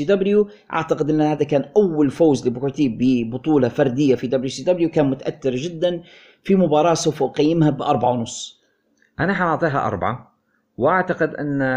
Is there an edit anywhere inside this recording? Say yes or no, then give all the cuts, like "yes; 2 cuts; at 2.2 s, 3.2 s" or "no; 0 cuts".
no; 0 cuts